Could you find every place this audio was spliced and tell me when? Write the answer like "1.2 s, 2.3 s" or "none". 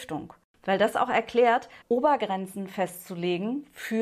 1.8 s